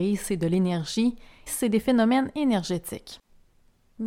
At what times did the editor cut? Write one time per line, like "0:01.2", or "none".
0:01.5